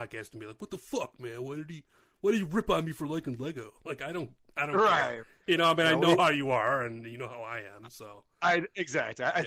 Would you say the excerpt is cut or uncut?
uncut